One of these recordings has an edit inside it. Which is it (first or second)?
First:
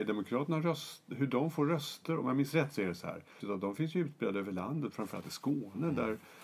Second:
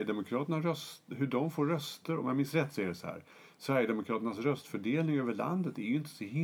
first